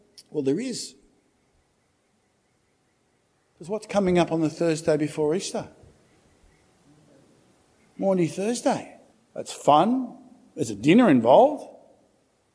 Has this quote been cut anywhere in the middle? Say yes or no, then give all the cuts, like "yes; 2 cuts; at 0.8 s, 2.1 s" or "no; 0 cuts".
yes; 1 cut; at 9.1 s